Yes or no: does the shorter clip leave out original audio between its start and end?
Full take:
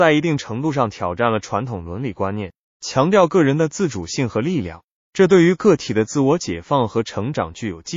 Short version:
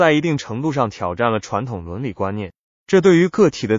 yes